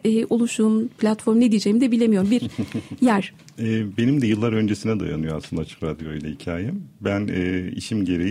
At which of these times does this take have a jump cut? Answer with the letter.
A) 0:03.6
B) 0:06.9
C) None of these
A